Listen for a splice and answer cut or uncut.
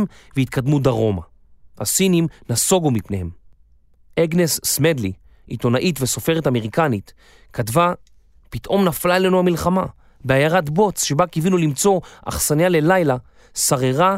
uncut